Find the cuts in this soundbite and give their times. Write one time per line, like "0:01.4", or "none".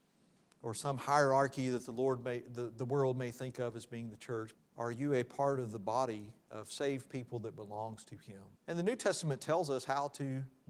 0:04.5
0:08.6